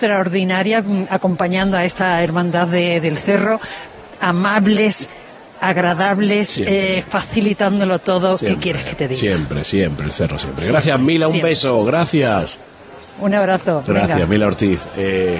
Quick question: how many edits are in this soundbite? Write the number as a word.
zero